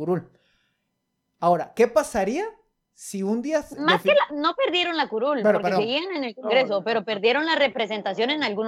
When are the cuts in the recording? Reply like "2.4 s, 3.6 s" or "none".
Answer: none